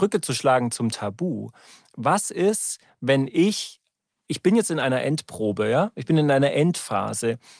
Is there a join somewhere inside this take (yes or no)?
no